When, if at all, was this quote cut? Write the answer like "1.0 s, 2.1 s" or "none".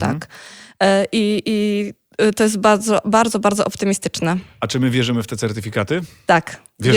none